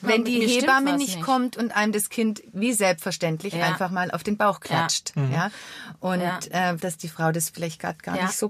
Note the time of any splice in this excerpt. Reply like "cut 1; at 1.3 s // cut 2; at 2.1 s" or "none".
cut 1; at 6.8 s